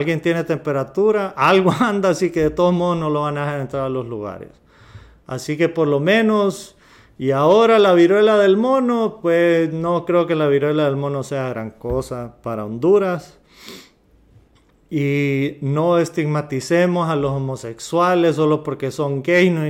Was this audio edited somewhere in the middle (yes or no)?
no